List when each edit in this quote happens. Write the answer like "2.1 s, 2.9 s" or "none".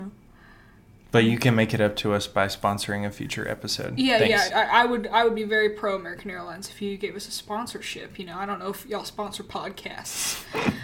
4.5 s